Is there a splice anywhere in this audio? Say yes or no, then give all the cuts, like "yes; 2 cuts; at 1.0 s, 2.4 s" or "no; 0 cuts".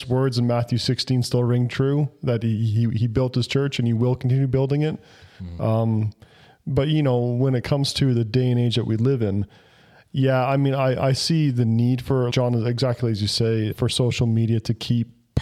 yes; 2 cuts; at 12.3 s, 13.7 s